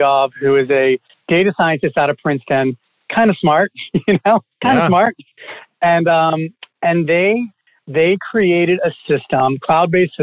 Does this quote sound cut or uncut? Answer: uncut